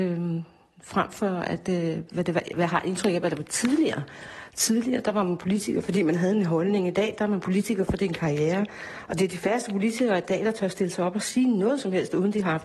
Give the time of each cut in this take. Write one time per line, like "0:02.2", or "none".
none